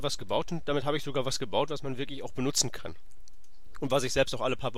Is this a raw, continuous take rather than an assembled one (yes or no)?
yes